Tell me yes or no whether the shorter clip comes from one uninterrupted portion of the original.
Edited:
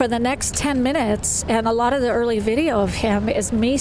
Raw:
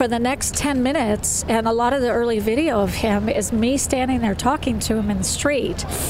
yes